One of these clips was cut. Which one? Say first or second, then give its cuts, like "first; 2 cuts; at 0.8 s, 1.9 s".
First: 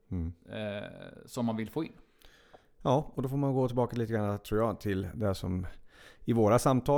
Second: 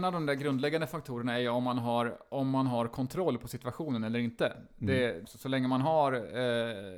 second; 1 cut; at 5.2 s